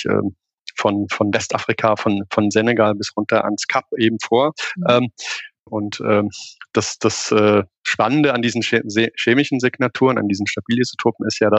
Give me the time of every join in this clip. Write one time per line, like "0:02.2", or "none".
0:05.7